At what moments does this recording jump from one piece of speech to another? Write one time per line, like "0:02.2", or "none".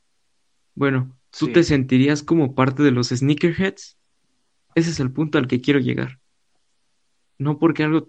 0:04.7